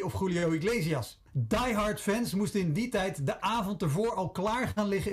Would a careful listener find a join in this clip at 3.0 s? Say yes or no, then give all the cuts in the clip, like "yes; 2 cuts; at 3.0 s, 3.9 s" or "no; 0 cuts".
no; 1 cut; at 1.3 s